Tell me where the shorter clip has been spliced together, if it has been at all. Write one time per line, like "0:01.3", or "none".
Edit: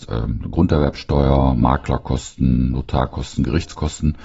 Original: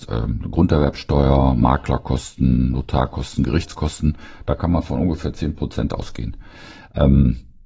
none

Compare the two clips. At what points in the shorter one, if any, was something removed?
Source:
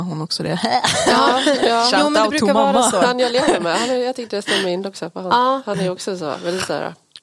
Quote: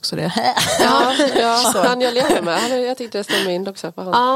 0:01.6

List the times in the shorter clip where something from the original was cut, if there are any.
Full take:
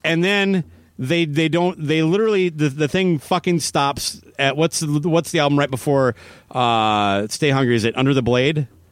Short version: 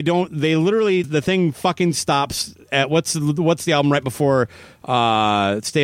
0:01.0

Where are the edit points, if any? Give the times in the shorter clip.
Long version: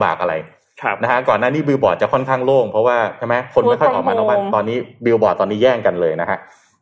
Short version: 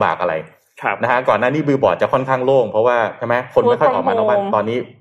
none

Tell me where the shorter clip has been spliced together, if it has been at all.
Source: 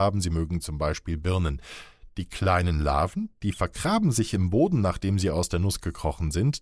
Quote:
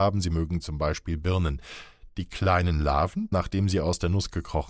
0:03.3

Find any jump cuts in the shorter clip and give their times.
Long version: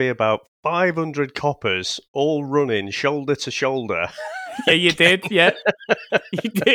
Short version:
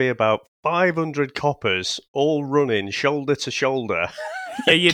none

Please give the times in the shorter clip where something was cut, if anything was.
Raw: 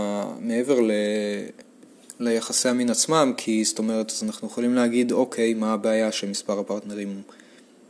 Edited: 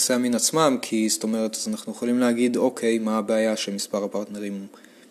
none

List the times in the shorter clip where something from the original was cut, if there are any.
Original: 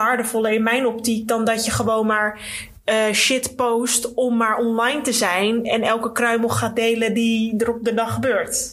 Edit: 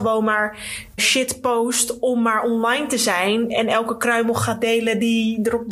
0:01.0

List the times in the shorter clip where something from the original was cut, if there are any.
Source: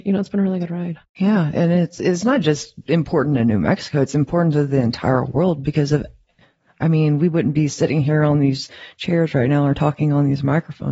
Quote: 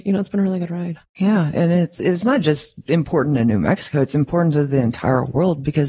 none

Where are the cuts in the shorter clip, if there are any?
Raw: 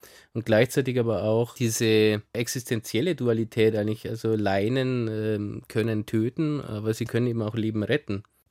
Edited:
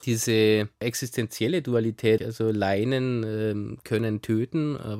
0:02.2

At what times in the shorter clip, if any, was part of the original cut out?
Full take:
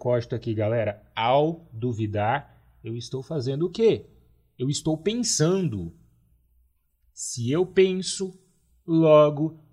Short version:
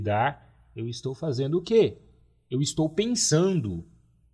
none

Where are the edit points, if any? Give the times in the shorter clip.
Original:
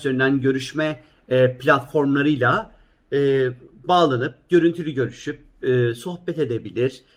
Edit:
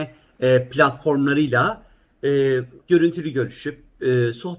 0:02.8

